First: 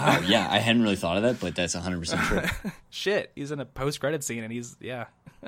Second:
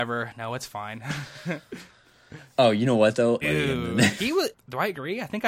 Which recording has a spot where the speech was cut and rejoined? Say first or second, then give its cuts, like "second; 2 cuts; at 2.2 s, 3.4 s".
second; 2 cuts; at 3.4 s, 4.5 s